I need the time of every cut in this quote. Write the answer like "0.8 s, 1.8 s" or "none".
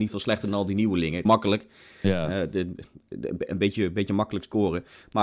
1.3 s